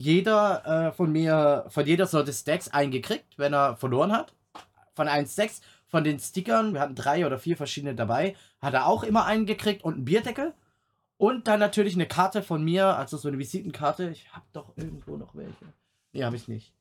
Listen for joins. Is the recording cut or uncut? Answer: uncut